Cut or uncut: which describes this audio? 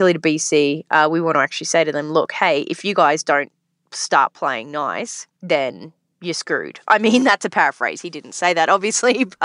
cut